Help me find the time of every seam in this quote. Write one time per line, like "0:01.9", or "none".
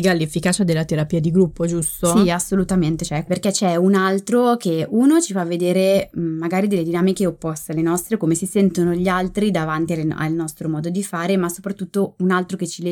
none